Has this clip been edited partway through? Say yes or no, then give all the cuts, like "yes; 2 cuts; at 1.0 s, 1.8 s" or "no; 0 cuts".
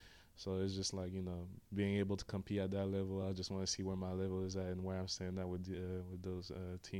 no; 0 cuts